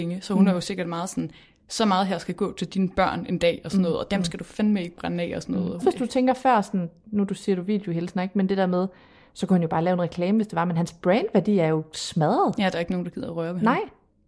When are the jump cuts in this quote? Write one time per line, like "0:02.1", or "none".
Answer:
0:05.8